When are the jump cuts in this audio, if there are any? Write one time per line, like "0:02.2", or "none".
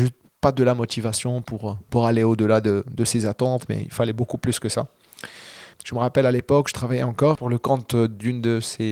0:05.7